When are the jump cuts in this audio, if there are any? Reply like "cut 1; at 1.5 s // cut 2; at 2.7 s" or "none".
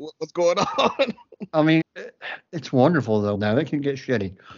cut 1; at 1.8 s // cut 2; at 3.3 s